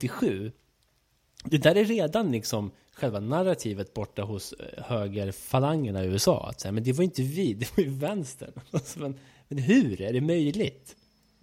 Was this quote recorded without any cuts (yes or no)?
yes